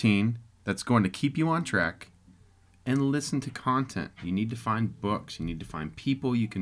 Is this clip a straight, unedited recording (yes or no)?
yes